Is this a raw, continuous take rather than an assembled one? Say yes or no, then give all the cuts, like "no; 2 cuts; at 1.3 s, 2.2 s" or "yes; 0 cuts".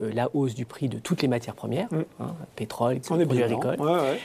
no; 1 cut; at 3.0 s